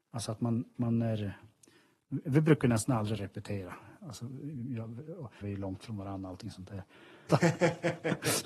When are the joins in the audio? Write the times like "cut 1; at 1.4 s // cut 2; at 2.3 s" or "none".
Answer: cut 1; at 5.4 s // cut 2; at 7.3 s